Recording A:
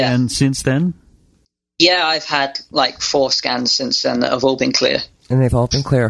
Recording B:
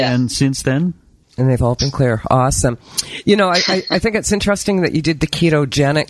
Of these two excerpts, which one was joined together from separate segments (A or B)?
B